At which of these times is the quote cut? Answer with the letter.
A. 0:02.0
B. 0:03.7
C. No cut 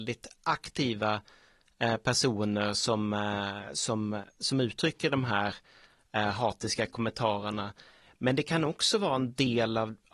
C